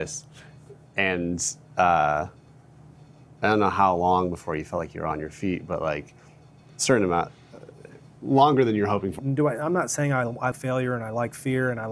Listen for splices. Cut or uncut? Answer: cut